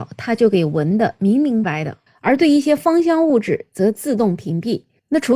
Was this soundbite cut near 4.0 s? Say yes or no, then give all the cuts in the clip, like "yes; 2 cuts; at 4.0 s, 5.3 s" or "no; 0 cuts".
no; 1 cut; at 1.6 s